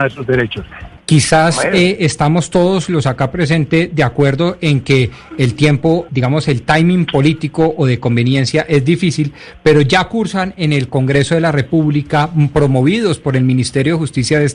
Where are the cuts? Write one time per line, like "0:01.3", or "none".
0:01.0
0:06.1